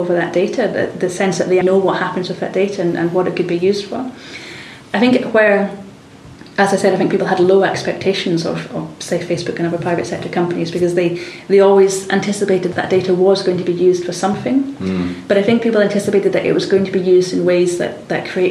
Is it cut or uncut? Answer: cut